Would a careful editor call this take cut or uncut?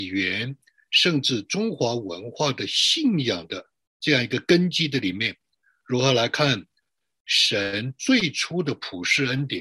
uncut